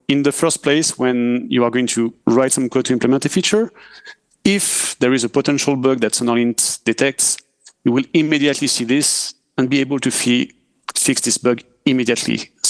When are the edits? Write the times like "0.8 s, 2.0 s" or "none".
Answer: 2.2 s

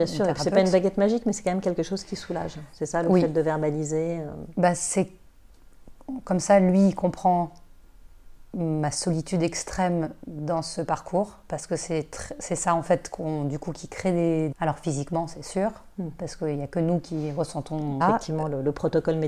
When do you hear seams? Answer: 14.5 s, 18.0 s

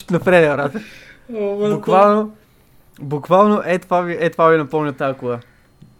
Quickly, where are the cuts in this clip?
none

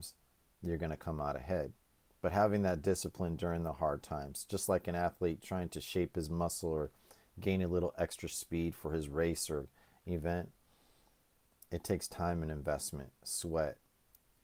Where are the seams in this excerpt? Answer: none

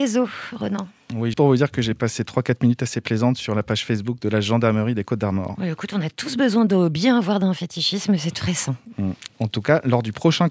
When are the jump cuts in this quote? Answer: 1.3 s, 9.3 s

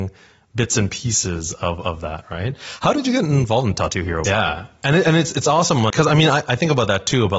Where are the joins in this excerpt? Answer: 4.2 s, 5.9 s

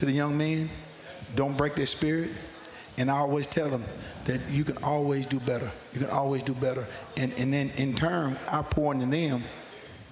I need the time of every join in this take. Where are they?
none

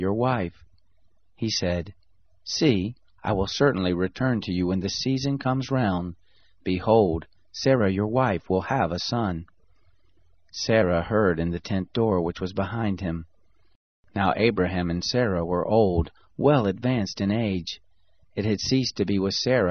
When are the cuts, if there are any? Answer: 3.0 s

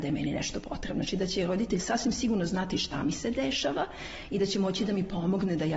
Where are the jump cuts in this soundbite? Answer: none

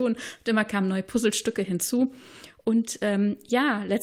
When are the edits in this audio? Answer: none

